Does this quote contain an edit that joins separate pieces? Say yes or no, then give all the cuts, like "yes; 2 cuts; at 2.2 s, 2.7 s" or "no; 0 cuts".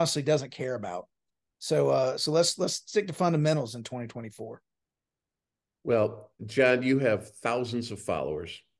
yes; 1 cut; at 6.4 s